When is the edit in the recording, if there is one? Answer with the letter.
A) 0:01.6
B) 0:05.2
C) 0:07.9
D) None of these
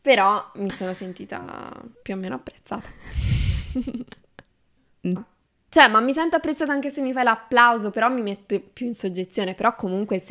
B